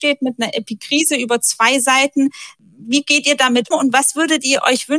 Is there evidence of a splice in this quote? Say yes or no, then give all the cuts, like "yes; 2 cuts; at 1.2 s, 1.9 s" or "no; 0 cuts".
yes; 1 cut; at 3.7 s